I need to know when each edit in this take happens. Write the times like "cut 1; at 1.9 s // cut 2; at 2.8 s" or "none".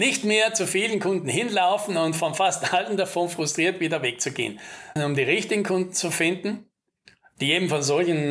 cut 1; at 5.0 s